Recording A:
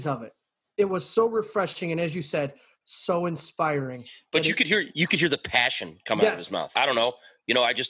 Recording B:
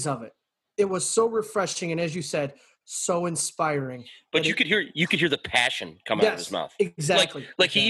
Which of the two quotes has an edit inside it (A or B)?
A